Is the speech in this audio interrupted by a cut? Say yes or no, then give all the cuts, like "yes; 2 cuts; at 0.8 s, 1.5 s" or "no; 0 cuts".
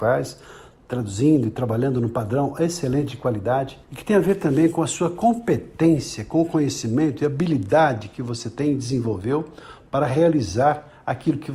yes; 1 cut; at 3.8 s